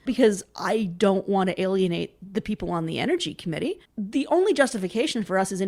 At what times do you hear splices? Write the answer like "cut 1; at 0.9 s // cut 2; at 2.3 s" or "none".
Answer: cut 1; at 3.8 s